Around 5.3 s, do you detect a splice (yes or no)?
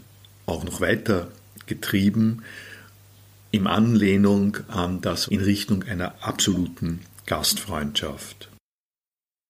yes